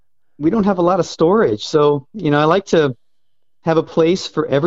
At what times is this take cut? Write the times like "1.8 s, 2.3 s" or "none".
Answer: none